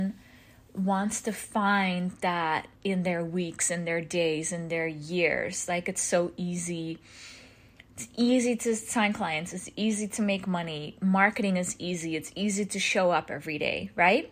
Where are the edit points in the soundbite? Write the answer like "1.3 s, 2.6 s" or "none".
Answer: 2.8 s